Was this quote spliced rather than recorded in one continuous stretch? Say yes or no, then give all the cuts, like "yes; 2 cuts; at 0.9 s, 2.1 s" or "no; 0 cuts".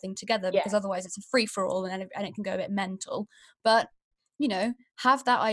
no; 0 cuts